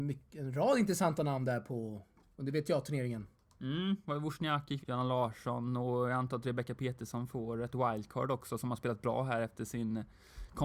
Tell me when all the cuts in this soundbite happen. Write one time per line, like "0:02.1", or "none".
0:04.8